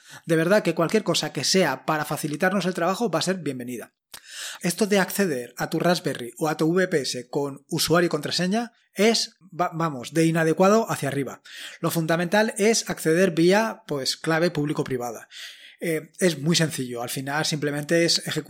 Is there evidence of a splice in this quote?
yes; 1 cut; at 4.6 s

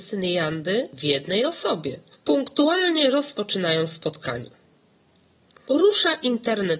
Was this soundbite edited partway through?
no; 0 cuts

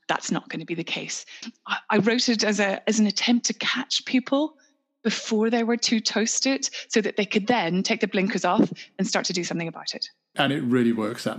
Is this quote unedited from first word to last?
no; 1 cut; at 1.4 s

